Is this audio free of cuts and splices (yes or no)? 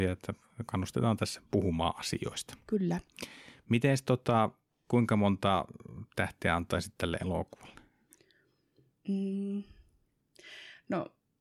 yes